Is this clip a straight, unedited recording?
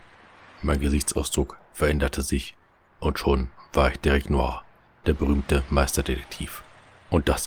yes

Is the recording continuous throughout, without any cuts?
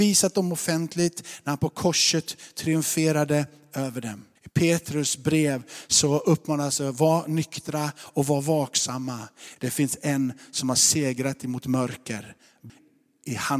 no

